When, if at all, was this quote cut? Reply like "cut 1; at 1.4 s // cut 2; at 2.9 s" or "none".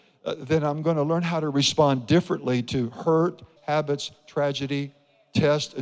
cut 1; at 3.6 s